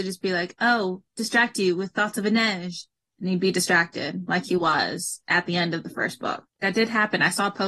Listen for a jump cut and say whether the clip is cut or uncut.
cut